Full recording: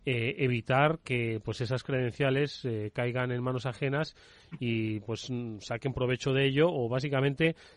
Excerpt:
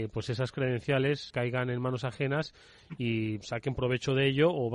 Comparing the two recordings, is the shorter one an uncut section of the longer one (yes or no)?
no